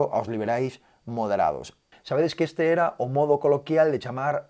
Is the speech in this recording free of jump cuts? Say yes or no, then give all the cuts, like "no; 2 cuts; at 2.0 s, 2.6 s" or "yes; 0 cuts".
no; 1 cut; at 1.9 s